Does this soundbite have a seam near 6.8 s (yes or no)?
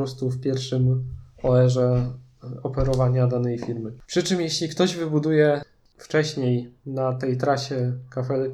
yes